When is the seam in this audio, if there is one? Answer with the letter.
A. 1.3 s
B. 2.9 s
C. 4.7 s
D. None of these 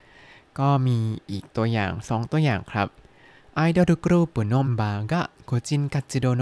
C